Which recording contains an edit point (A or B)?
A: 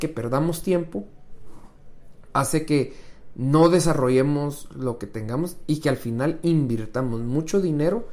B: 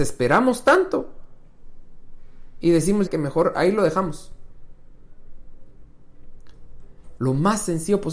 B